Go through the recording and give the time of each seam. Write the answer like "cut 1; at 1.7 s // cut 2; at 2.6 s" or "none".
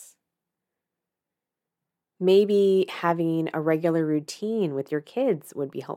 cut 1; at 2.0 s